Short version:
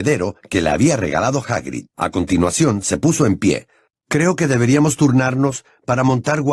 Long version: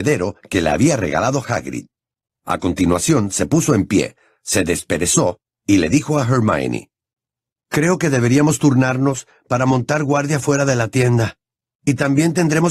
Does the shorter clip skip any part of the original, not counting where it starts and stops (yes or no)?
yes